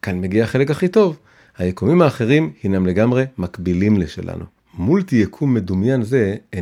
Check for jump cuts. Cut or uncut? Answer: cut